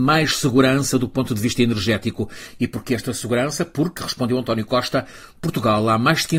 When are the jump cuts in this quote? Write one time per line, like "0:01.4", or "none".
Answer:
none